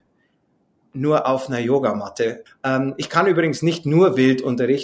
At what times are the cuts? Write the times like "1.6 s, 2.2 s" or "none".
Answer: 2.5 s